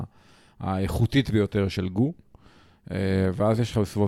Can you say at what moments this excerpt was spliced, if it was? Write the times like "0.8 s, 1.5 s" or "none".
none

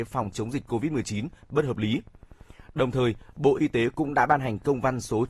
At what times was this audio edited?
none

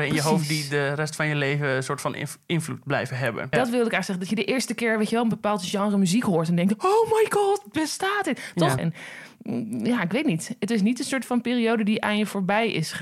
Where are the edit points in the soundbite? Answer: 3.5 s, 8.8 s

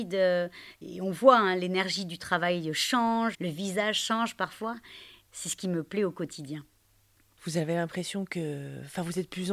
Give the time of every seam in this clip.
3.3 s

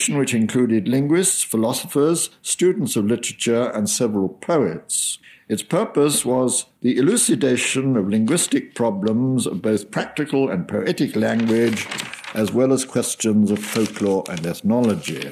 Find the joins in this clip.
none

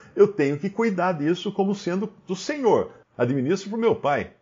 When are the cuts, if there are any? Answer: 3.0 s

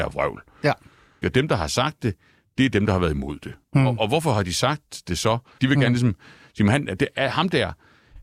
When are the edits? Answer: 1.2 s, 5.6 s

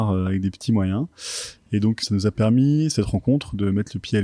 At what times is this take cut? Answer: 2.0 s

